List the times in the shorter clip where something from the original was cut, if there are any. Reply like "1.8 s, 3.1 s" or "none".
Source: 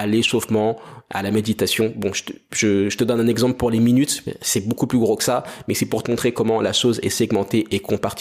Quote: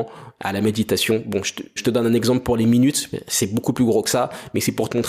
1.8 s